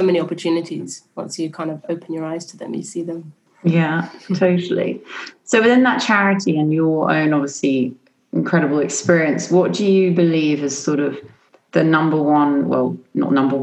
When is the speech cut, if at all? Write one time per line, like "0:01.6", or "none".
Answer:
none